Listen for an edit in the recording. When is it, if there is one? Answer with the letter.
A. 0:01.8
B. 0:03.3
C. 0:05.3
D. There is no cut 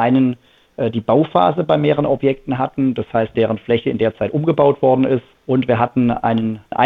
B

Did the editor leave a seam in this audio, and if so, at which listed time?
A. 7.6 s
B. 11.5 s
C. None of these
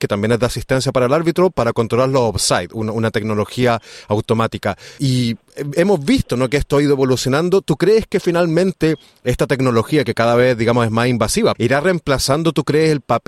B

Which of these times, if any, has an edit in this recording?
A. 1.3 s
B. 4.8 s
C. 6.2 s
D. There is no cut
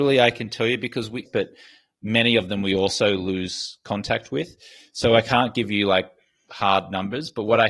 A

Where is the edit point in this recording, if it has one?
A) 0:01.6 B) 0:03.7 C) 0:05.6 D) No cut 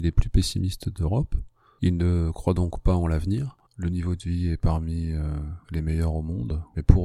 B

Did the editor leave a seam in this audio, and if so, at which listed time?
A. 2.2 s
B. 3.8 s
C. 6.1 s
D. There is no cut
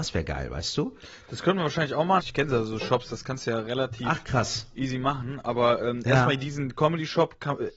A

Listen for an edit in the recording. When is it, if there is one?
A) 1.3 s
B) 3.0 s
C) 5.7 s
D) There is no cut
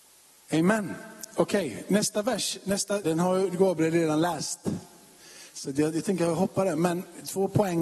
B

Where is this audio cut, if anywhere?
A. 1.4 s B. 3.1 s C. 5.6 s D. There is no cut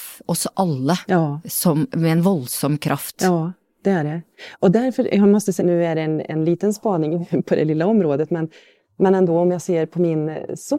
C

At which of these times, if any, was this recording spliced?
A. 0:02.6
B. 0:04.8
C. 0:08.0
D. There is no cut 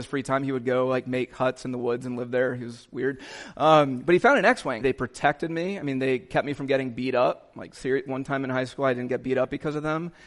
B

